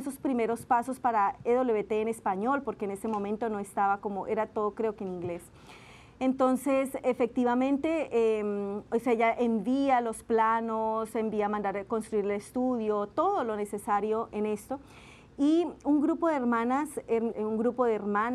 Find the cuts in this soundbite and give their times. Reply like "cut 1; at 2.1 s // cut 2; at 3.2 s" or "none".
cut 1; at 14.3 s // cut 2; at 17.3 s